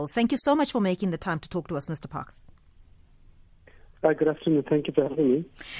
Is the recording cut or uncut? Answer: uncut